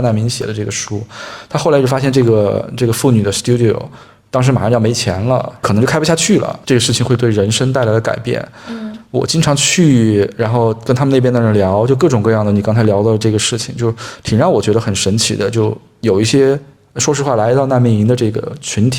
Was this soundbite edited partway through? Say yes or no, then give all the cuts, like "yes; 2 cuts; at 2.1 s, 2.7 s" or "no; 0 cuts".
yes; 1 cut; at 6.6 s